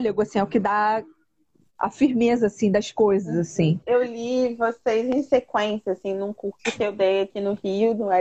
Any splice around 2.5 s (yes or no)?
no